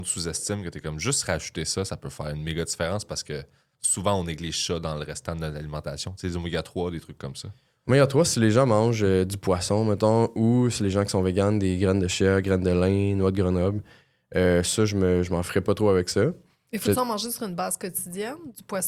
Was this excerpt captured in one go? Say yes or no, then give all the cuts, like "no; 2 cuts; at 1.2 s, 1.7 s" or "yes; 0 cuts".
yes; 0 cuts